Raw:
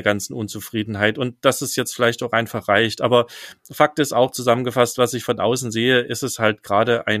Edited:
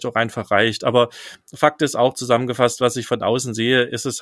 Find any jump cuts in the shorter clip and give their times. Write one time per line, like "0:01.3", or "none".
none